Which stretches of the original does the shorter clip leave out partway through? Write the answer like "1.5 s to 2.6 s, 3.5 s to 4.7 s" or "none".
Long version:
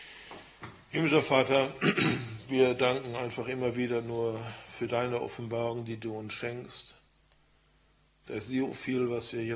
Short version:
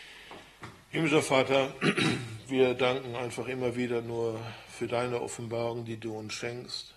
none